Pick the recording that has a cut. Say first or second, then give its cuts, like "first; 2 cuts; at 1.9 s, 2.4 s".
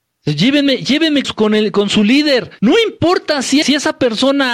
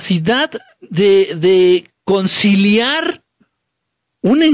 first; 3 cuts; at 1.2 s, 2.6 s, 3.6 s